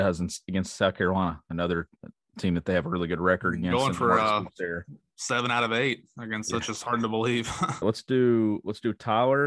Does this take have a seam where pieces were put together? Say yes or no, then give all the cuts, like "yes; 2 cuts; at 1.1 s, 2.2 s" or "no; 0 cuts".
yes; 1 cut; at 7.8 s